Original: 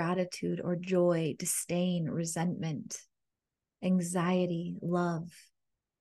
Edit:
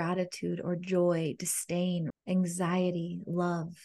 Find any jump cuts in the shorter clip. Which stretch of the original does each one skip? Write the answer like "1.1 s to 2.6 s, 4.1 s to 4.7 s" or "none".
2.1 s to 3.7 s